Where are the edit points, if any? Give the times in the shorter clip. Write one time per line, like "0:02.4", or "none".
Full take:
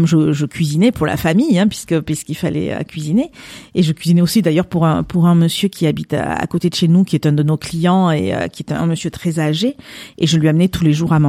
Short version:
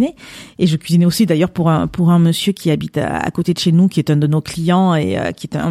none